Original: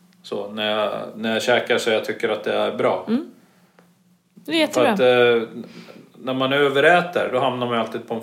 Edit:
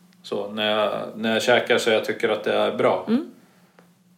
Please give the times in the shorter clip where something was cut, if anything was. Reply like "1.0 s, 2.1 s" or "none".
none